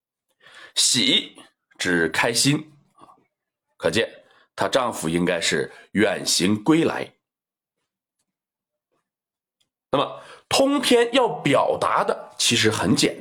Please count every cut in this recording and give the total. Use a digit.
0